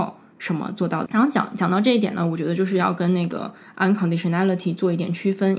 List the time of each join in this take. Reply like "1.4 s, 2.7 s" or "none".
1.1 s